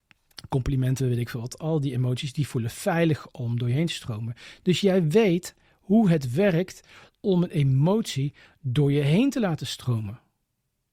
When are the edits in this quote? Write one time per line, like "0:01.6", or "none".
none